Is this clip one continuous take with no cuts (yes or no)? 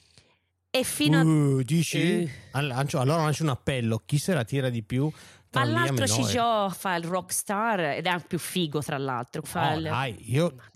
no